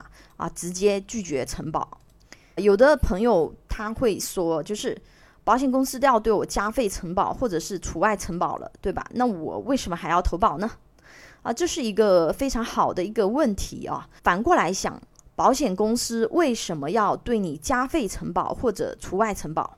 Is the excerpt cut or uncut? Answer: cut